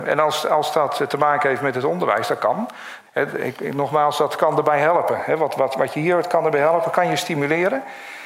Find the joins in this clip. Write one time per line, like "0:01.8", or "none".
0:03.1